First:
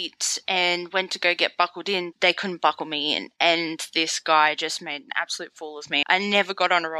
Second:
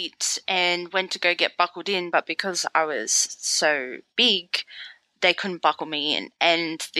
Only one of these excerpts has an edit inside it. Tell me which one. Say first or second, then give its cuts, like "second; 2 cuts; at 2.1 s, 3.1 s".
first; 2 cuts; at 2.1 s, 6.0 s